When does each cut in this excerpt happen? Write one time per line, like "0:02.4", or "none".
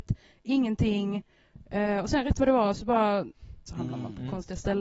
0:03.7